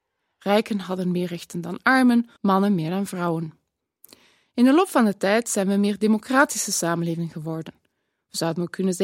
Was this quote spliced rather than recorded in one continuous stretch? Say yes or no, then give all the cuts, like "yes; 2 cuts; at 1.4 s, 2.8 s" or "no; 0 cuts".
yes; 1 cut; at 2.4 s